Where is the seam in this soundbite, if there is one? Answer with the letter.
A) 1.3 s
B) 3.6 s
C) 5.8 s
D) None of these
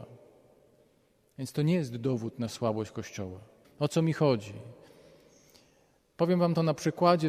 B